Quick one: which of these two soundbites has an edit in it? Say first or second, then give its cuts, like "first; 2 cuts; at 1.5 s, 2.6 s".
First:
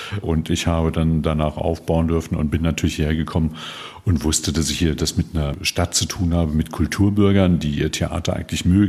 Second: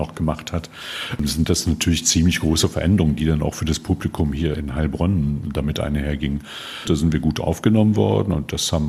second; 1 cut; at 6.8 s